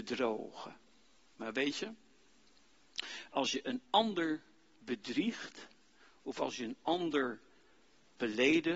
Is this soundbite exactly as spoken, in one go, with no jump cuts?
yes; 0 cuts

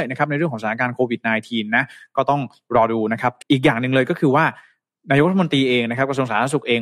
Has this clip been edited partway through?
yes; 1 cut; at 3.4 s

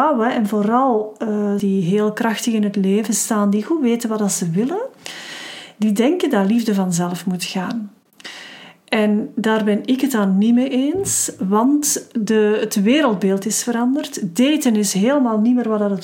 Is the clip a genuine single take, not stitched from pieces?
no; 1 cut; at 1.6 s

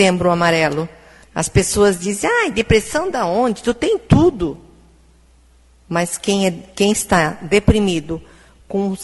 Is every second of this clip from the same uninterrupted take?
no; 1 cut; at 1.2 s

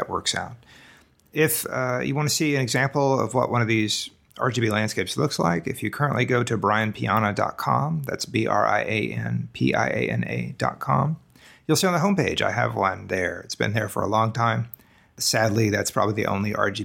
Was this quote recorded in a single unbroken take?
yes; 0 cuts

